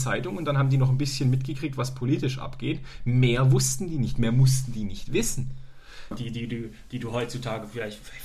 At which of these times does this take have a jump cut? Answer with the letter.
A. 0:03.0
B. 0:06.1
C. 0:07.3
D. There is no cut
B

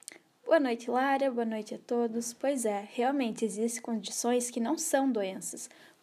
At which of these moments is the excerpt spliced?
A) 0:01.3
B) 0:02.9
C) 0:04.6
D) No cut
D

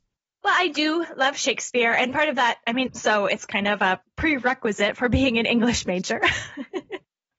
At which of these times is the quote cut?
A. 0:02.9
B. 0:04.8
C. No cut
A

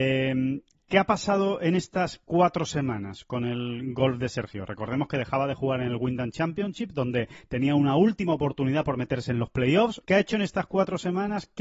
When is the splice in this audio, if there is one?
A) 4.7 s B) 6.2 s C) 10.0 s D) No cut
C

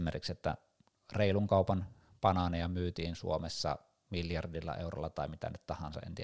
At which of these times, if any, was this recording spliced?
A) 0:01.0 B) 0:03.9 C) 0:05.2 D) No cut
D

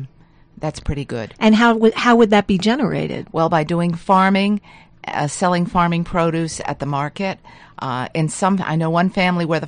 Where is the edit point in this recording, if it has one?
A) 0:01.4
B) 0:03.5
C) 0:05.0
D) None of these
D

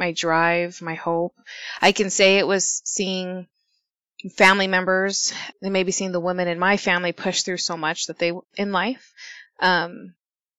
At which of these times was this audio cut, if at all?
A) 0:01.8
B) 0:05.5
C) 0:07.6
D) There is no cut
B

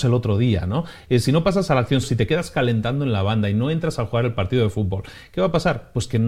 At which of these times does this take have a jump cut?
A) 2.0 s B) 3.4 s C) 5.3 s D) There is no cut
A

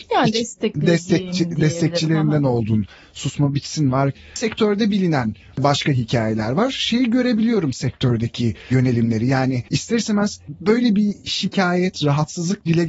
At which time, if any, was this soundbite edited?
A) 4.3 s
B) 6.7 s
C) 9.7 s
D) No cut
C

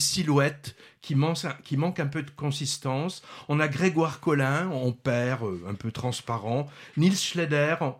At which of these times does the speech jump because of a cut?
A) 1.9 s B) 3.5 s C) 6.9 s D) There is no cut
D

